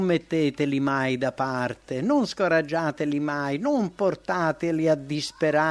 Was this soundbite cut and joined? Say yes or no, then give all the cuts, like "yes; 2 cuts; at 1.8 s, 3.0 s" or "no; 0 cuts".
no; 0 cuts